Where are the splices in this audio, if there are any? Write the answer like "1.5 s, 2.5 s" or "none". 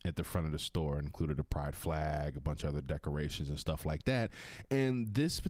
none